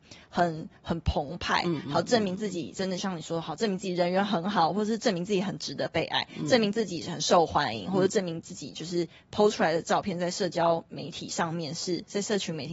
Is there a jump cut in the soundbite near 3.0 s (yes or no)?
yes